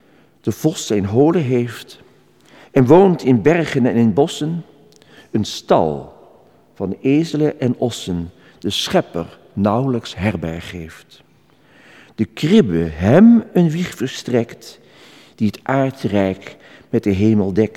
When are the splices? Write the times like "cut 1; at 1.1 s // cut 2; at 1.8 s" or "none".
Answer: none